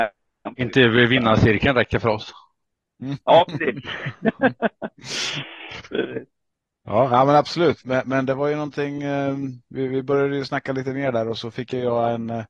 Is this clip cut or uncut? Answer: cut